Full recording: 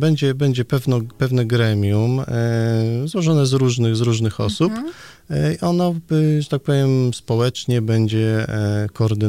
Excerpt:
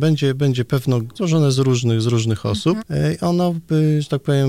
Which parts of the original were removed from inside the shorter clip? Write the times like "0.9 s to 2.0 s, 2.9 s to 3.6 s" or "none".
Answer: 1.2 s to 3.1 s, 4.7 s to 5.2 s